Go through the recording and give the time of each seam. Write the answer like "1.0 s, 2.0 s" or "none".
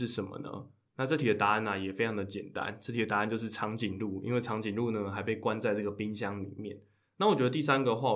none